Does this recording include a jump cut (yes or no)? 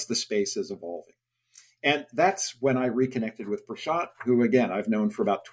no